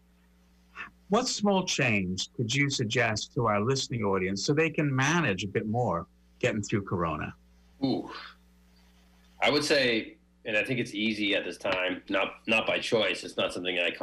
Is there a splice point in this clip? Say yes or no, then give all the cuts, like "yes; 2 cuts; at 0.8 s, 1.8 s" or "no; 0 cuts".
yes; 2 cuts; at 7.7 s, 12.1 s